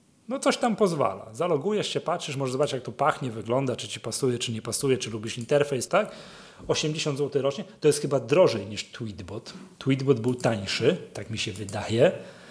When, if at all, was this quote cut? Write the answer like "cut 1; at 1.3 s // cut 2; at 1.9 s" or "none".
cut 1; at 5.9 s